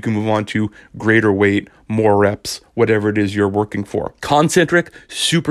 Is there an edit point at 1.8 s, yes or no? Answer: no